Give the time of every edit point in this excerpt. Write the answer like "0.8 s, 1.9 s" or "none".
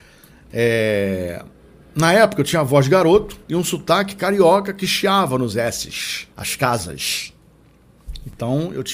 3.4 s, 6.3 s